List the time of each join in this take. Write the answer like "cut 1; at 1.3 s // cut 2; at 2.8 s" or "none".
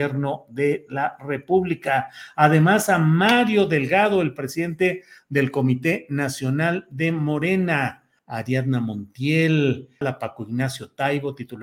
cut 1; at 8.2 s // cut 2; at 10.0 s